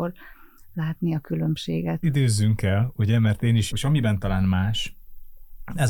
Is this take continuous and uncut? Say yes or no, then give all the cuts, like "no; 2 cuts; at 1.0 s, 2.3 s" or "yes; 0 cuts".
no; 2 cuts; at 2.0 s, 3.7 s